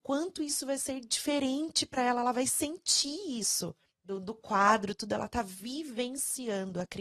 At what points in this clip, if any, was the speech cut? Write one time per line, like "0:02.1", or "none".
0:03.9